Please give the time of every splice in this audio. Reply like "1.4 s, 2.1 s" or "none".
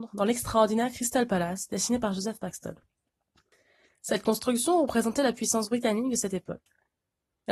none

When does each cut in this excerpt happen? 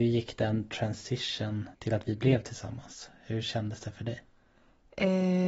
1.7 s

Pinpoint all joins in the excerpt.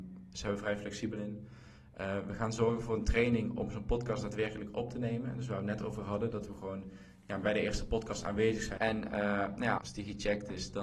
8.8 s, 9.8 s

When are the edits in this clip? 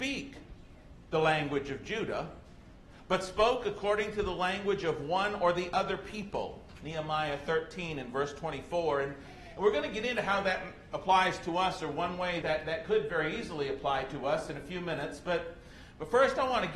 12.4 s

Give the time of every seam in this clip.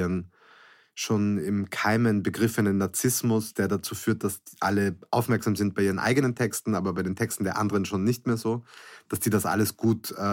none

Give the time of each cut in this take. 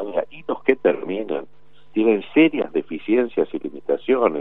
none

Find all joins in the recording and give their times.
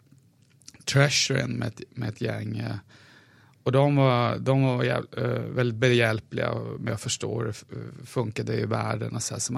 none

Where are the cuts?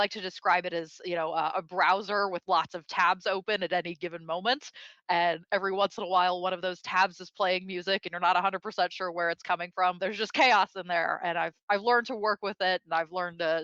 10.0 s

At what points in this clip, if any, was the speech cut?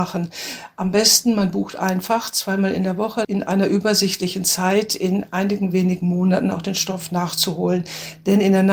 3.2 s

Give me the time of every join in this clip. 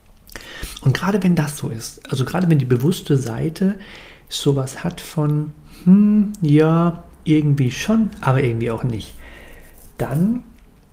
none

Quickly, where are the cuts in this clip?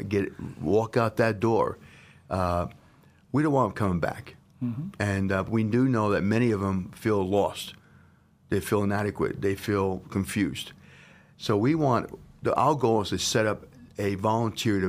none

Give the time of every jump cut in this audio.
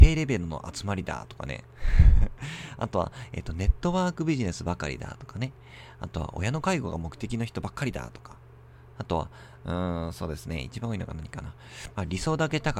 none

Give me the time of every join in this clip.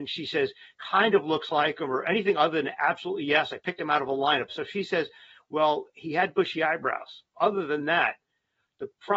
4.5 s, 7.3 s

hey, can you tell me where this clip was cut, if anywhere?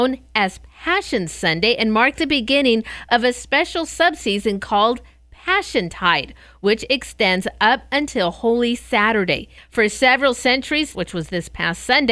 9.6 s, 10.9 s

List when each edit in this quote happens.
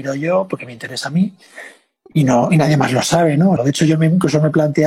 3.6 s

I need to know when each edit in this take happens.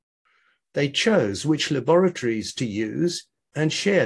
none

